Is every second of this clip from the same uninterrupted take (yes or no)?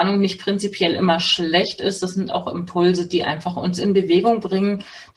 yes